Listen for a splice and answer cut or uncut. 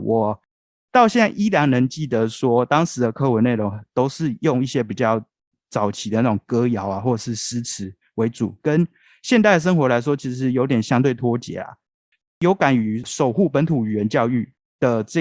uncut